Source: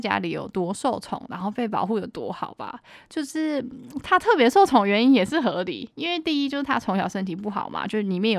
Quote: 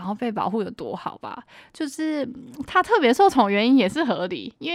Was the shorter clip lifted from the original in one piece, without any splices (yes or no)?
yes